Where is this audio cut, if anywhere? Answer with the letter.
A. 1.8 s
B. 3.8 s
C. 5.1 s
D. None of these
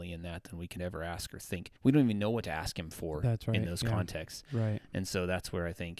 A